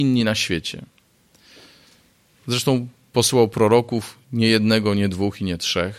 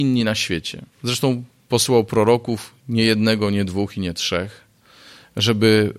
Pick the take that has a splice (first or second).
second